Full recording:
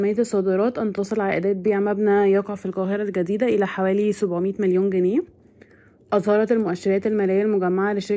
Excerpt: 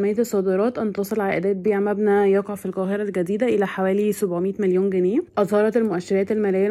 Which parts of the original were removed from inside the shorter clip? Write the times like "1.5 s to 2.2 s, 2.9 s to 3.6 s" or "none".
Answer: 5.3 s to 6.0 s